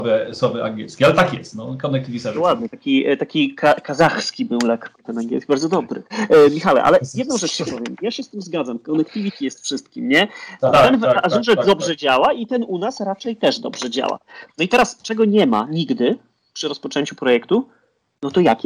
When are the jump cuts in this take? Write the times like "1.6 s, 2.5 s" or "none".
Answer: 10.7 s